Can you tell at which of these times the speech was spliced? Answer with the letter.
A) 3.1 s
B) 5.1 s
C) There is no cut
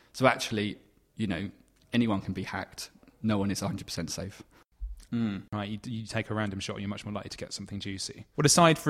B